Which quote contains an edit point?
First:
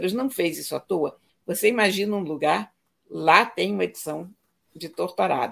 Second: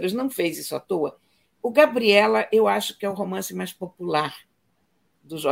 first; 1 cut; at 1.3 s

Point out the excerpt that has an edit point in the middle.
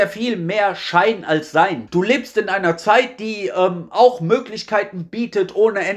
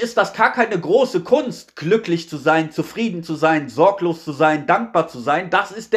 first; 1 cut; at 1.9 s

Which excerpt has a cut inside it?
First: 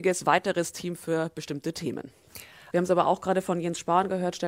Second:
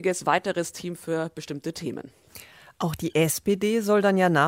first; 1 cut; at 2.7 s

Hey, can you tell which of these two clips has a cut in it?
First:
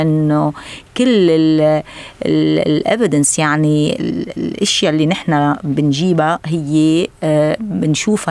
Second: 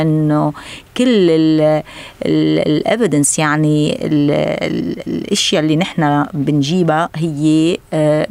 first; 1 cut; at 4.0 s

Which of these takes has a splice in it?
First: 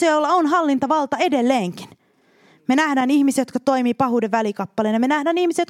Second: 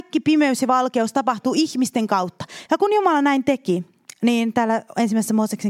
second; 1 cut; at 2.7 s

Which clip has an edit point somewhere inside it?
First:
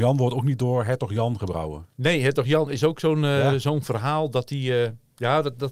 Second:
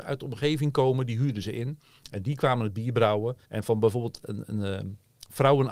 second; 1 cut; at 3.4 s

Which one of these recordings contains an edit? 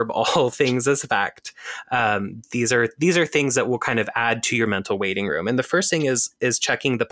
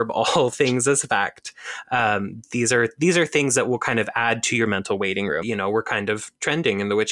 second; 1 cut; at 5.4 s

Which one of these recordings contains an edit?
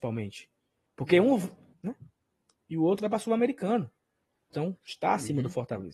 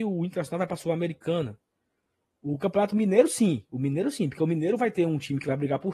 first; 2 cuts; at 1.7 s, 4.5 s

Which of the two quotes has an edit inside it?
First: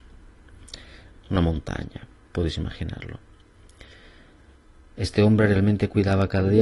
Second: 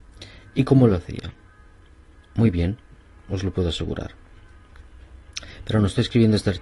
first; 1 cut; at 1.2 s

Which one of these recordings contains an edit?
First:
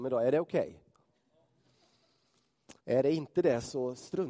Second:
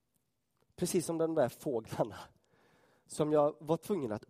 first; 1 cut; at 2.8 s

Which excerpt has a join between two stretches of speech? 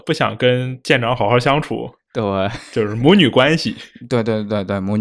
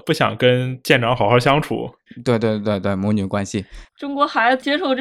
second; 2 cuts; at 2.1 s, 3.9 s

